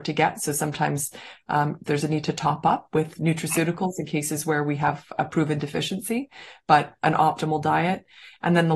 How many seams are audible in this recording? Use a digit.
1